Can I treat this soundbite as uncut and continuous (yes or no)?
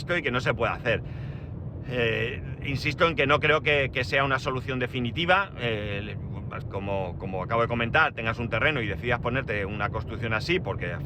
no